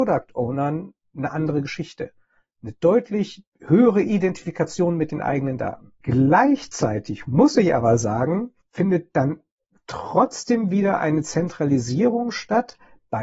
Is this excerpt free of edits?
yes; 0 cuts

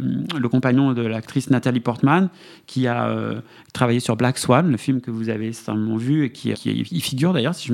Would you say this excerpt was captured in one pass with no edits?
no; 1 cut; at 6.5 s

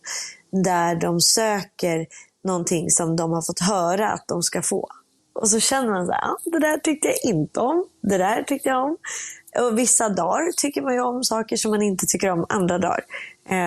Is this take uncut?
no; 1 cut; at 5.2 s

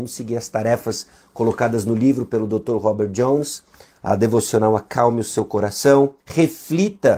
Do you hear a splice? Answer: yes; 1 cut; at 6.2 s

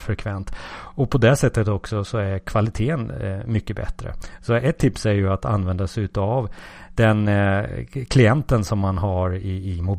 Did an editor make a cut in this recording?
no; 0 cuts

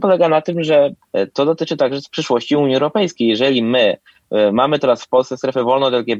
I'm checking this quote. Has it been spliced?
no; 0 cuts

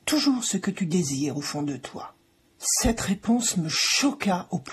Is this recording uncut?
yes; 0 cuts

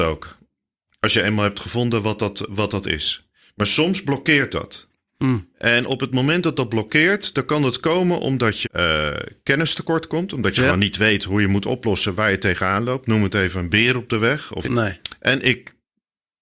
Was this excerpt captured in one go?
no; 2 cuts; at 8.6 s, 14.6 s

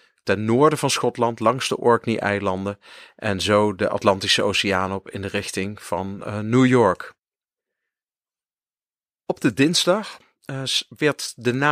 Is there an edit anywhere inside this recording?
no; 0 cuts

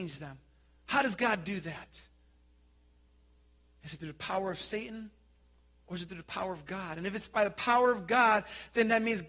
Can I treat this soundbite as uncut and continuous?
yes; 0 cuts

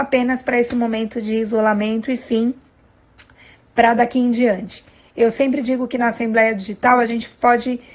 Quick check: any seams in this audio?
no; 0 cuts

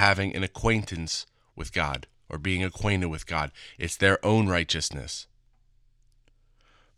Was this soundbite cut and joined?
no; 0 cuts

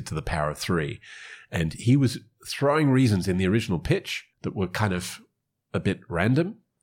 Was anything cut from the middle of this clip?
yes; 1 cut; at 4.3 s

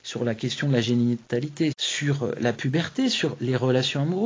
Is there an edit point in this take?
yes; 1 cut; at 1.7 s

